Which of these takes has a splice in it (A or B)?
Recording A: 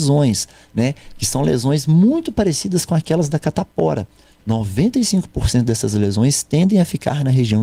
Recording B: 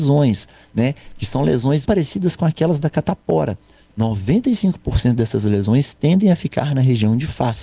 B